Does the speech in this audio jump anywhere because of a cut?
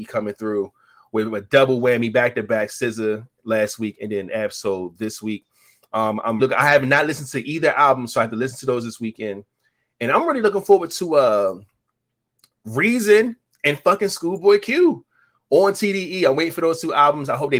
yes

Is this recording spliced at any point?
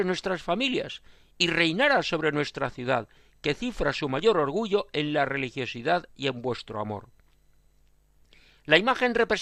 no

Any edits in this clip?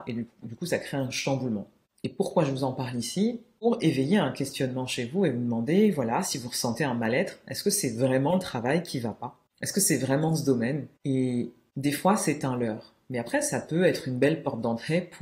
no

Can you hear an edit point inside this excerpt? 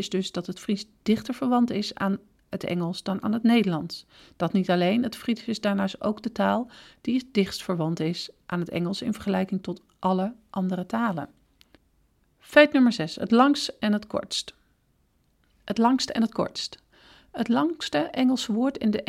no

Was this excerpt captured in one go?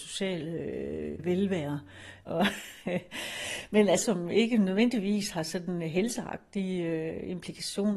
no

